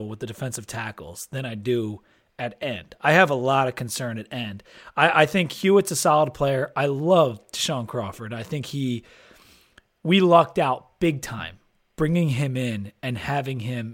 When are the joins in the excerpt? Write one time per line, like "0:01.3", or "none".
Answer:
none